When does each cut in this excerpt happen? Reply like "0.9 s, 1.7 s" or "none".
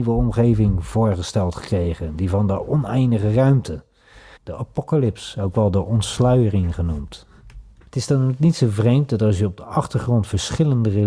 4.4 s, 7.8 s